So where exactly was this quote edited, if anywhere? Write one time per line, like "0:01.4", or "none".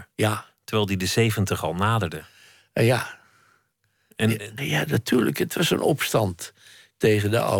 0:04.6

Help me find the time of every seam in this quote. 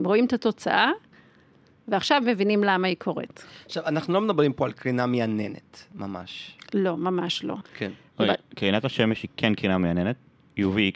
0:07.6

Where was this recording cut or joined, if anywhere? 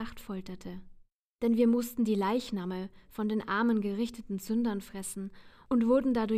none

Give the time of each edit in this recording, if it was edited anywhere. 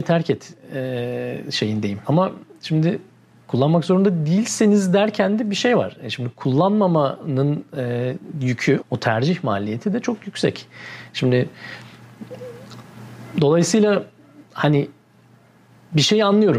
0:02.0
0:08.8

